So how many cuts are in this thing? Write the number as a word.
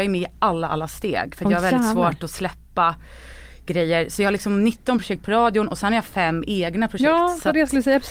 zero